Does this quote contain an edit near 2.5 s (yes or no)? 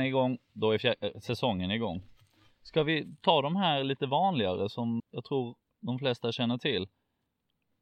no